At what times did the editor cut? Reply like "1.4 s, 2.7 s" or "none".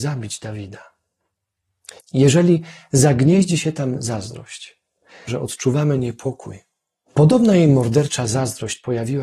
2.0 s, 5.3 s, 7.0 s